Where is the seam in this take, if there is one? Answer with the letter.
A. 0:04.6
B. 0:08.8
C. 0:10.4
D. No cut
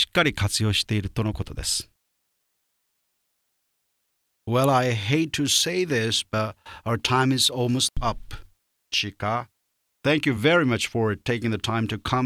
D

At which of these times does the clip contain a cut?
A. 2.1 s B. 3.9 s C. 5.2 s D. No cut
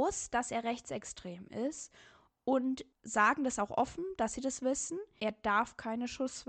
C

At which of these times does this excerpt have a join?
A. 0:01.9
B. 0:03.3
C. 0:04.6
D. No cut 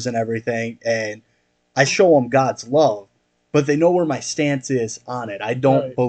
A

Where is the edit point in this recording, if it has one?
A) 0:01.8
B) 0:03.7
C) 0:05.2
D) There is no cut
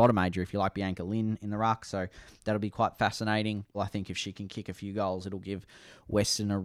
B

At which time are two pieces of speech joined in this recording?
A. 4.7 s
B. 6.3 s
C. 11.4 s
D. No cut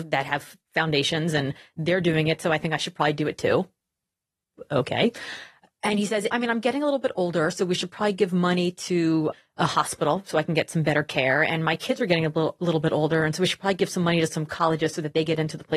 B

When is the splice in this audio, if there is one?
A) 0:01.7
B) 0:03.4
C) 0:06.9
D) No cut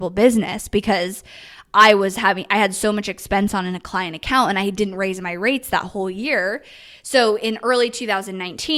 D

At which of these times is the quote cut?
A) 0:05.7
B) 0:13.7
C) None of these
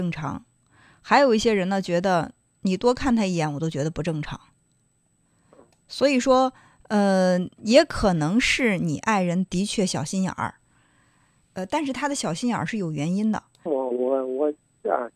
B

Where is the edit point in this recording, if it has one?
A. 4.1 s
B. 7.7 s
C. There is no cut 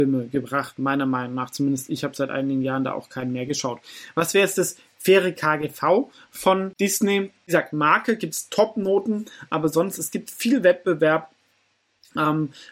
C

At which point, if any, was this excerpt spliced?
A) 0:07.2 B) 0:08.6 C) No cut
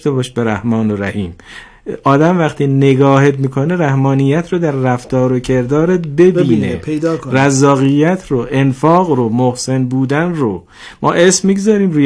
C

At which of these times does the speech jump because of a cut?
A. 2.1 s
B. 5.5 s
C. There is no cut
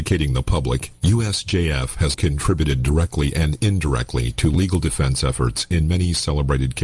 A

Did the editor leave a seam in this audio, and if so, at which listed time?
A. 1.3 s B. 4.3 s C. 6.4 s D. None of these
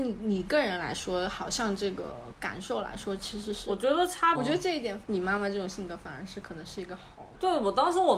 B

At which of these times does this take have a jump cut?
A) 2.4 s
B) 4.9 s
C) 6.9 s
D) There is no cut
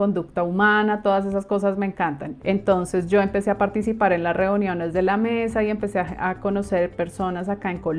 A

